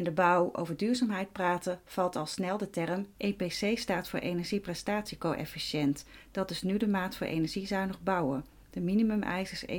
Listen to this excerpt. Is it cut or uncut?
cut